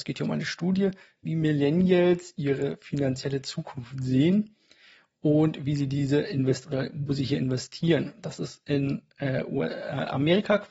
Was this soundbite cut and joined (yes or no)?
no